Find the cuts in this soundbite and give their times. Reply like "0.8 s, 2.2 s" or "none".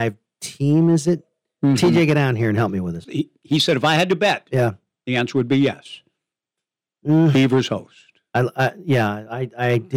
3.0 s